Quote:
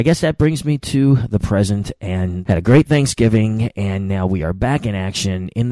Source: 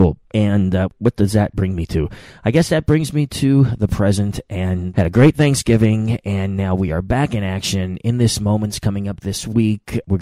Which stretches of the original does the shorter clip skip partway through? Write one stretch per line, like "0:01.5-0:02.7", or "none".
none